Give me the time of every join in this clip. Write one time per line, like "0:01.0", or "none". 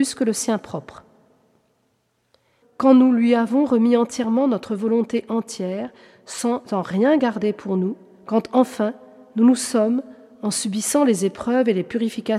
0:02.6